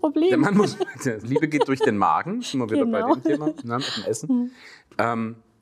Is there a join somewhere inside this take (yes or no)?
yes